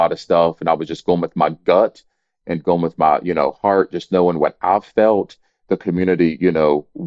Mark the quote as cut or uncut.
uncut